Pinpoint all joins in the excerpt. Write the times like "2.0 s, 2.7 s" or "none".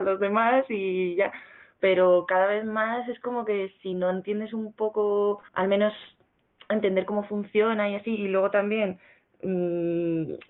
5.5 s